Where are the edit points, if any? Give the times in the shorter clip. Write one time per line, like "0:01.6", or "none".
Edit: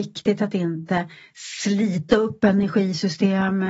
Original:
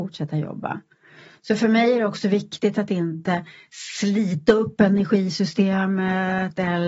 none